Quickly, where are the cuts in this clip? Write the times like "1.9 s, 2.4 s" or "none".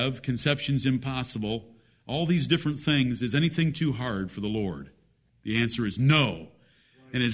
5.3 s